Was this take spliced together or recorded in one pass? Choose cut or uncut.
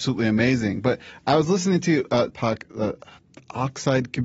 cut